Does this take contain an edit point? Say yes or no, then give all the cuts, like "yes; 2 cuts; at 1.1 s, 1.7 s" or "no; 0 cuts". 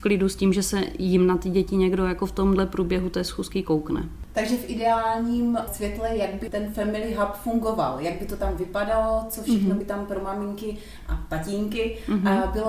no; 0 cuts